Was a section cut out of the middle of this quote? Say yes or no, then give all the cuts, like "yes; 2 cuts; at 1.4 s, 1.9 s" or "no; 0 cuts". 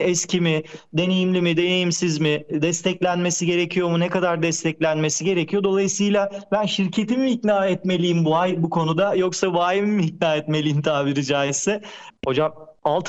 yes; 1 cut; at 12.1 s